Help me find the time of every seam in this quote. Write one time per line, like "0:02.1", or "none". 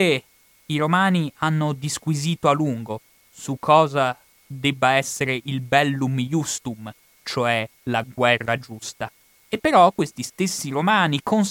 0:09.4